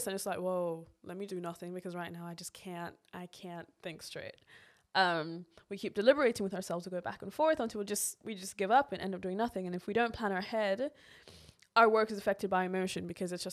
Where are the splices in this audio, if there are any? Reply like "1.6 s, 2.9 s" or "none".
1.3 s